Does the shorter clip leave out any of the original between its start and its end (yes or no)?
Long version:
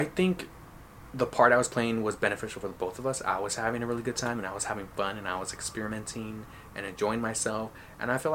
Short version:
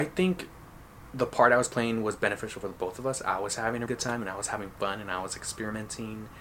yes